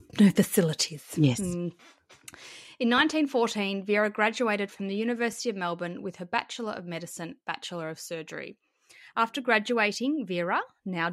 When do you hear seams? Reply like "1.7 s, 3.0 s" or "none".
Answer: none